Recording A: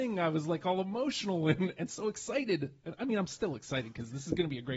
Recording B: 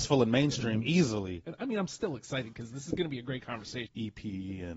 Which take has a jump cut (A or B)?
B